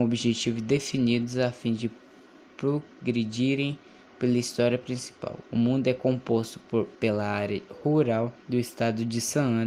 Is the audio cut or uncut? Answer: cut